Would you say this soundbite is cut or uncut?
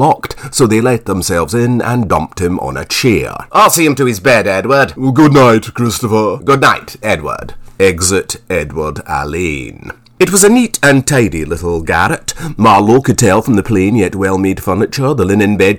uncut